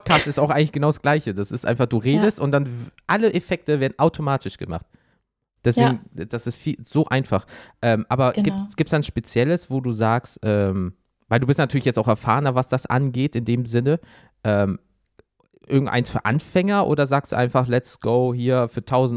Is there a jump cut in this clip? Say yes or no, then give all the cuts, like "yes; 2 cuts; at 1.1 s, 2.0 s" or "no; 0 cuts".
no; 0 cuts